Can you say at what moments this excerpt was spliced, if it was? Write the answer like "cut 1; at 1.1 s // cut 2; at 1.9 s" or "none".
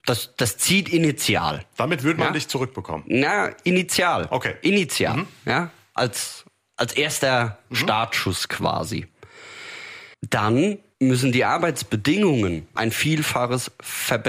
cut 1; at 10.1 s // cut 2; at 12.8 s